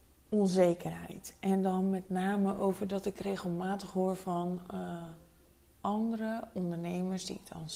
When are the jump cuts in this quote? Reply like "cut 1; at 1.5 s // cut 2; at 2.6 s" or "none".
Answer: none